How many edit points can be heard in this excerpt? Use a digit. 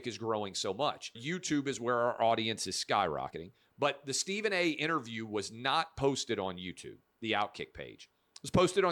1